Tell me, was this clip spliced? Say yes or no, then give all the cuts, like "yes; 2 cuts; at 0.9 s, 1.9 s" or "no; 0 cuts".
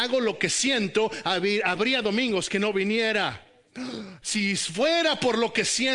yes; 1 cut; at 4.2 s